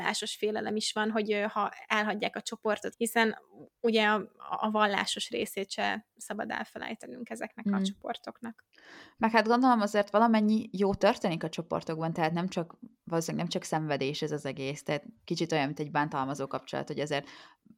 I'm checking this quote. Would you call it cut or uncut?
cut